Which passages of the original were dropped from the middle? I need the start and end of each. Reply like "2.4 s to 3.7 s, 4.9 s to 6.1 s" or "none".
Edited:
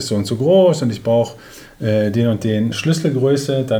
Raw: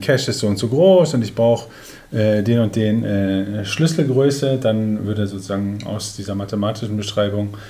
3.0 s to 3.7 s